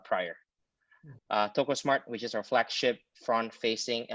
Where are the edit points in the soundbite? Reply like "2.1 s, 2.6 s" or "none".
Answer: 1.2 s